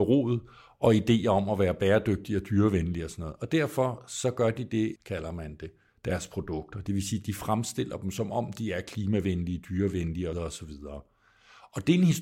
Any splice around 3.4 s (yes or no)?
no